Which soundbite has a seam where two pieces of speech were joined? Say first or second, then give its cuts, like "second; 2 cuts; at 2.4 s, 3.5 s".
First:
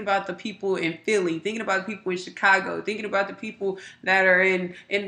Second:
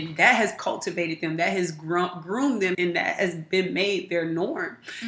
second; 1 cut; at 2.7 s